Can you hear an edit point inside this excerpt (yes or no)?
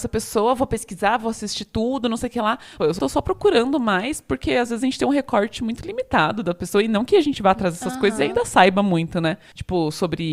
yes